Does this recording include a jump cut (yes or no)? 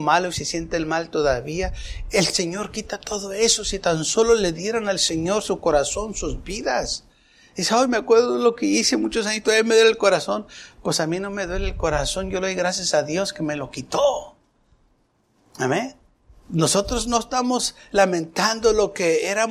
no